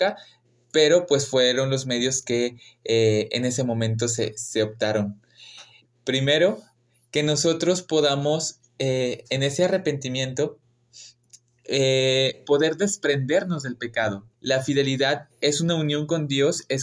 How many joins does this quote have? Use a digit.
2